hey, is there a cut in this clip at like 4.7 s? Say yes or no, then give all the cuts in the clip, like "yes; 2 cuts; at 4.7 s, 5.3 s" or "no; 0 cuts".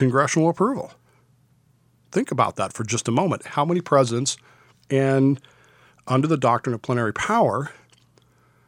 yes; 1 cut; at 4.7 s